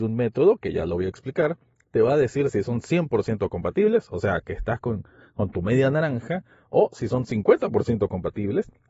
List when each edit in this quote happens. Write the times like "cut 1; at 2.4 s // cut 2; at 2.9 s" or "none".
none